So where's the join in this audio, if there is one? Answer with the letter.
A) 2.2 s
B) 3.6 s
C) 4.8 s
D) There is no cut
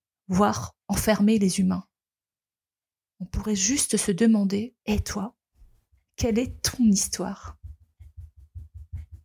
C